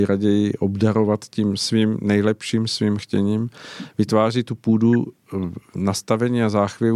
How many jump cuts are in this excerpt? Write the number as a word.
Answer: zero